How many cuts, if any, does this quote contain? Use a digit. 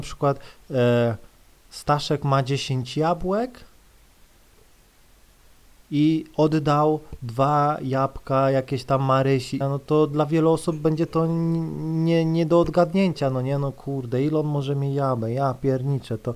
1